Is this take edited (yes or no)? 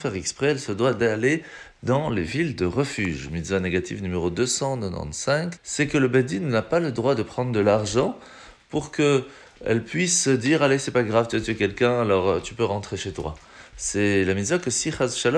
yes